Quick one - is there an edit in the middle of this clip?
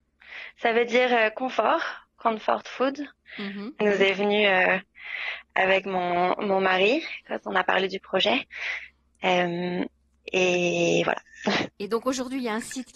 yes; 1 cut; at 3.8 s

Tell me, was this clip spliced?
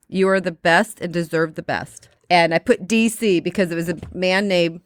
no; 0 cuts

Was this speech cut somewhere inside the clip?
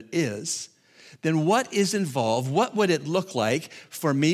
no; 0 cuts

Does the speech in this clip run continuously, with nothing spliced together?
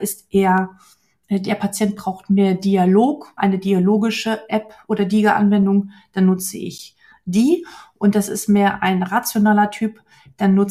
no; 1 cut; at 3.4 s

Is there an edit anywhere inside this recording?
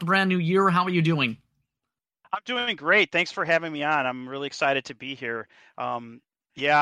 no; 0 cuts

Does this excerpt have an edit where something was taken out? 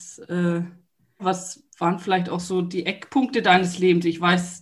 yes; 1 cut; at 1.2 s

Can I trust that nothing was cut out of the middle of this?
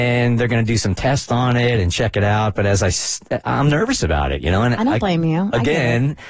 yes; 0 cuts

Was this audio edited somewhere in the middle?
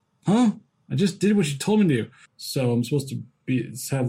yes; 1 cut; at 2.3 s

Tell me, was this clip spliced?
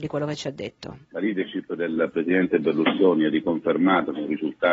yes; 1 cut; at 1.0 s

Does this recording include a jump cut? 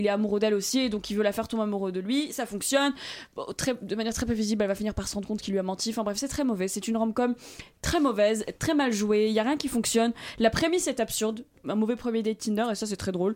yes; 2 cuts; at 8.5 s, 11.6 s

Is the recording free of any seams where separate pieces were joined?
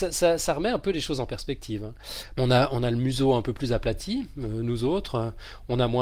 no; 1 cut; at 2.4 s

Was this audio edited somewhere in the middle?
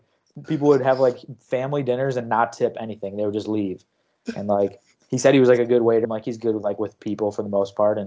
yes; 1 cut; at 6.0 s

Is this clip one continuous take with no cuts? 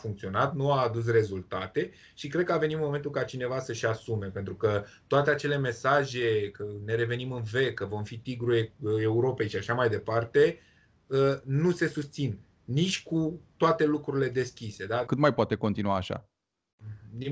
no; 1 cut; at 15.1 s

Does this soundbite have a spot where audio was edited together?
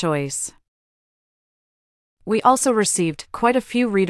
no; 0 cuts

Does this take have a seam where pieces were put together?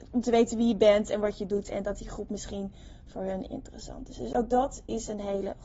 no; 0 cuts

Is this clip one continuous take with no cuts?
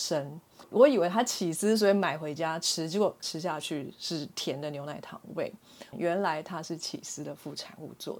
no; 1 cut; at 5.9 s

